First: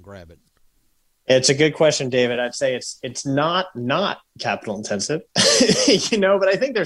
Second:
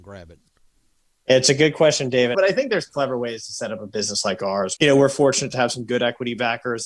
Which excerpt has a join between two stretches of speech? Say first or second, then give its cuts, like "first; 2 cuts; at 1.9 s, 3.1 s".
second; 2 cuts; at 2.3 s, 4.8 s